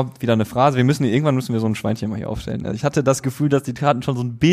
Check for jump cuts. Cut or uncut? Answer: uncut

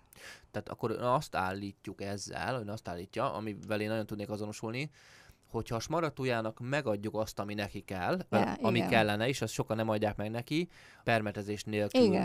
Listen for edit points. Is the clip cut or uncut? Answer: cut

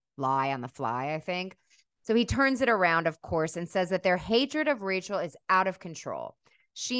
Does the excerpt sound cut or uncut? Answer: uncut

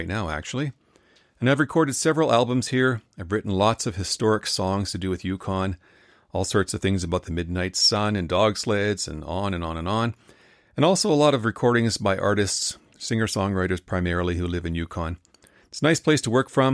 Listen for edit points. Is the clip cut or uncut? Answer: uncut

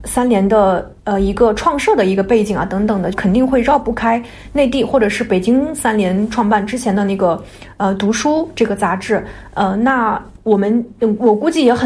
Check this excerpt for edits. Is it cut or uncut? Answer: cut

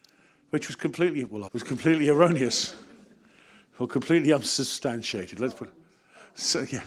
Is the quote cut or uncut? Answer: cut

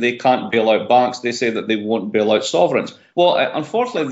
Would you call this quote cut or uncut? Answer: uncut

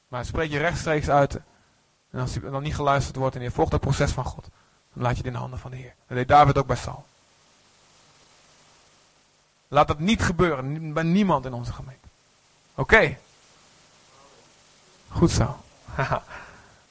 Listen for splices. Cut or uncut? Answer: uncut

